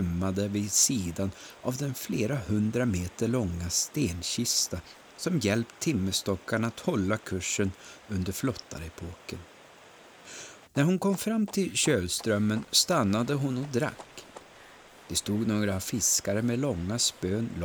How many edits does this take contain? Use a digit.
1